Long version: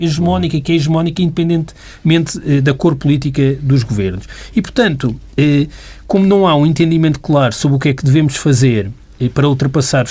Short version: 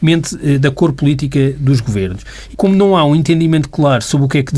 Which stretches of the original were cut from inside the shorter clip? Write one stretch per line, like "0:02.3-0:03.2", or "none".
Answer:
0:04.5-0:06.0